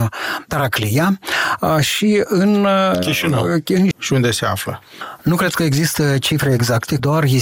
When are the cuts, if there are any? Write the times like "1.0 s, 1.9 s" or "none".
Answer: 3.9 s